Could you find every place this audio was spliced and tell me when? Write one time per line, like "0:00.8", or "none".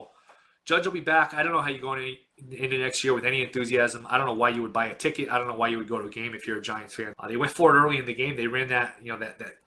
0:07.1